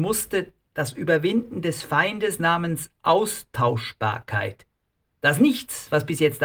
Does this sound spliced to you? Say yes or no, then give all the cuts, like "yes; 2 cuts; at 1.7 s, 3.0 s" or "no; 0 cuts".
no; 0 cuts